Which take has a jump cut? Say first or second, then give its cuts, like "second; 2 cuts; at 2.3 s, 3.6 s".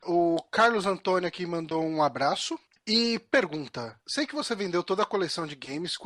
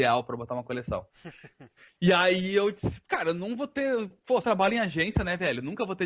second; 1 cut; at 4.4 s